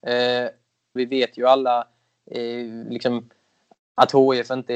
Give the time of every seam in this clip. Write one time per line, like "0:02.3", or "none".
0:01.0